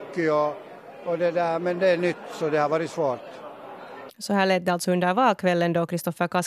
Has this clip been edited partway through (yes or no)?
yes